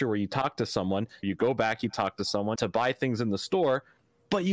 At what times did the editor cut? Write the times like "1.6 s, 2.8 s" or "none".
1.2 s, 2.5 s